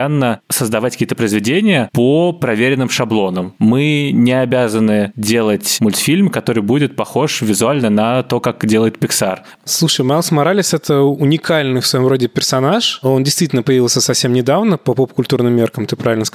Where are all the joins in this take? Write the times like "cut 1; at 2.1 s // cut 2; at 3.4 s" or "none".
cut 1; at 3.6 s // cut 2; at 9.5 s